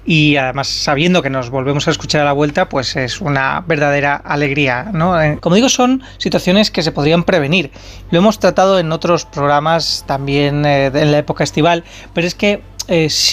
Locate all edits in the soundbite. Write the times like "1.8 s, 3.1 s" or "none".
5.4 s, 8.1 s